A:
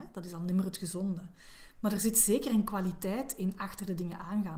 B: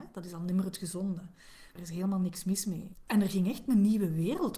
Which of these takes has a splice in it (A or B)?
B